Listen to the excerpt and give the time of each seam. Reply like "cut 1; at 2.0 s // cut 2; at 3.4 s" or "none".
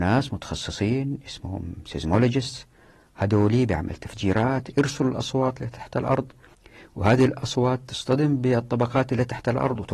none